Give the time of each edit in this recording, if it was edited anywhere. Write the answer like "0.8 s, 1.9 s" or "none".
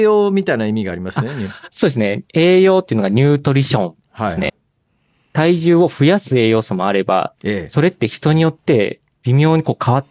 4.5 s, 7.4 s